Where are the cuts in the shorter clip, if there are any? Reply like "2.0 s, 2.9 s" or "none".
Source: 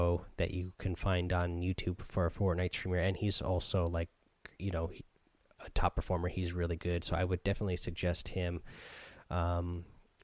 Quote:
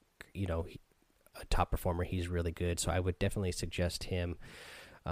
none

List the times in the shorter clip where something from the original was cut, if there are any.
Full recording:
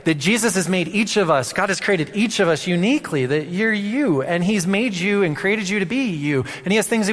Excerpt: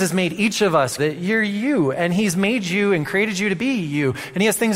1.0 s

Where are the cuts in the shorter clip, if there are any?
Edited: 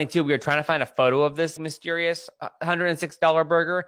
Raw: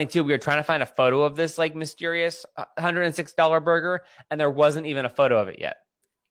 1.6 s

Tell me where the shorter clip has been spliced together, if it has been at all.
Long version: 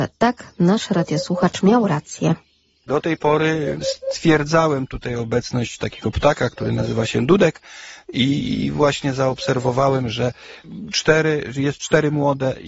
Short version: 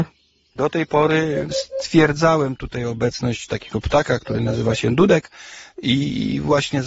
none

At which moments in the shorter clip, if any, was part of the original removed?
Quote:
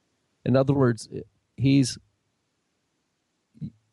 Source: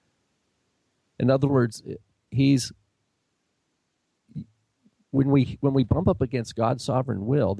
none

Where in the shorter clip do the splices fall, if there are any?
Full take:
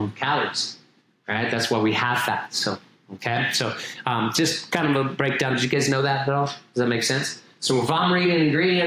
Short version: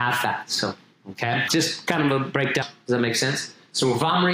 1.5 s, 2.6 s

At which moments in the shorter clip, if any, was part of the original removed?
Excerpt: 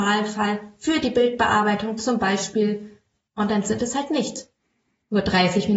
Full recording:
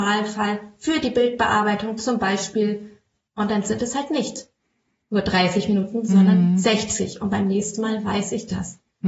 none

